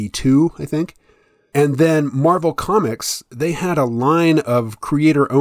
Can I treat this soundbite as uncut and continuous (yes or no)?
yes